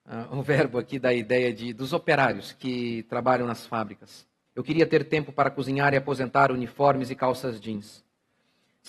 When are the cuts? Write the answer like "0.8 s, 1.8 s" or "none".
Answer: 4.5 s